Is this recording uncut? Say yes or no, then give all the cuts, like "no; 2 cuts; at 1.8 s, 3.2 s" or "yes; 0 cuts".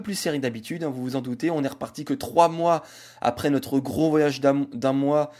yes; 0 cuts